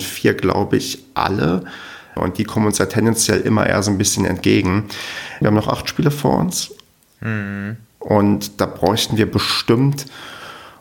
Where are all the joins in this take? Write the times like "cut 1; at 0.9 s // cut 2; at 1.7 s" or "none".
cut 1; at 2.2 s // cut 2; at 5.4 s